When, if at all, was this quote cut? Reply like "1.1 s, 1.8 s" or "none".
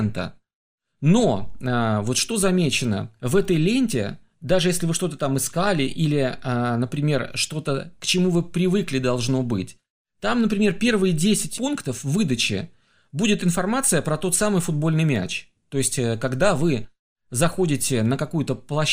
15.6 s